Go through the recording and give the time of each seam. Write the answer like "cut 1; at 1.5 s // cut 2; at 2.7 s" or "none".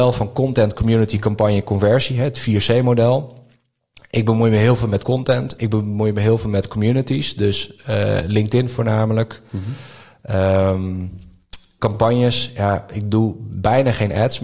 cut 1; at 11.8 s

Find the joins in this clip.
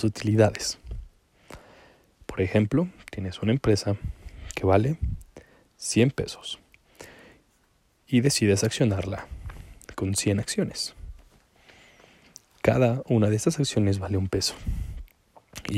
none

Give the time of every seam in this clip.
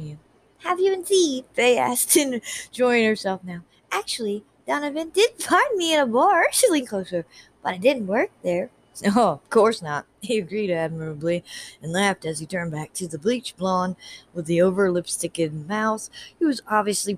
cut 1; at 9.4 s

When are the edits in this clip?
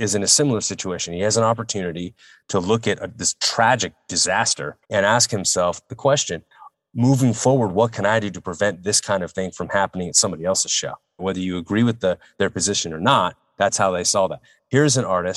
cut 1; at 4.8 s // cut 2; at 11.2 s

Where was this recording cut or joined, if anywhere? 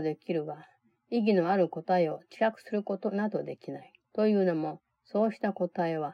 cut 1; at 4.0 s

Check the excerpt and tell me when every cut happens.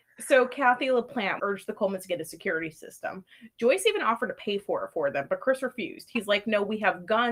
cut 1; at 1.4 s

